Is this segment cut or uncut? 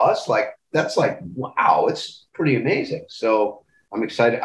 uncut